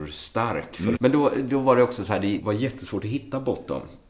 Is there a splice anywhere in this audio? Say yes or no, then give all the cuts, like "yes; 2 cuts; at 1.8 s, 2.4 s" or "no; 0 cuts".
yes; 2 cuts; at 1.0 s, 2.4 s